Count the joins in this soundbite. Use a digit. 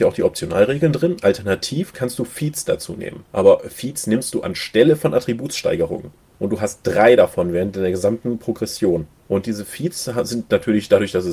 0